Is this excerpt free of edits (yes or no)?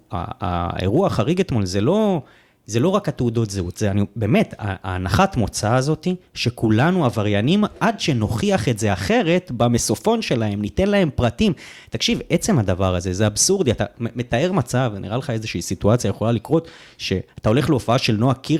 yes